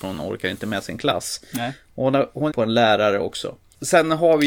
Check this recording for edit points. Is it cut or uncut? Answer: cut